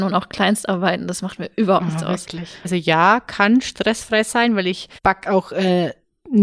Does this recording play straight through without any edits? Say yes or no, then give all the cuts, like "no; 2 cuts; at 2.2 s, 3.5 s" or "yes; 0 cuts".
no; 2 cuts; at 2.6 s, 5.0 s